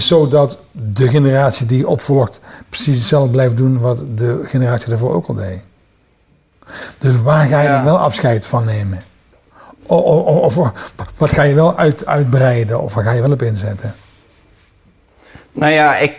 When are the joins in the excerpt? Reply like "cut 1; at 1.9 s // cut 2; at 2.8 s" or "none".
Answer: cut 1; at 12.1 s